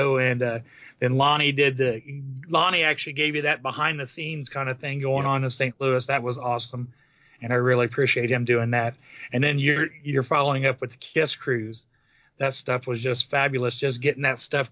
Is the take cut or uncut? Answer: uncut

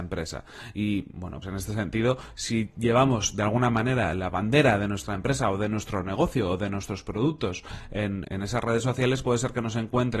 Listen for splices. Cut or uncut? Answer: cut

